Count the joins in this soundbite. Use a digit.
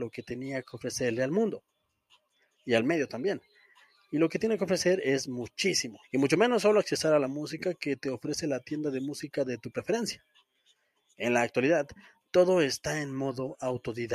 1